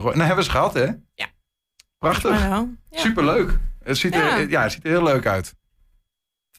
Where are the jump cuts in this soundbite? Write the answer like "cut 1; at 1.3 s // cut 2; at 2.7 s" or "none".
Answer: none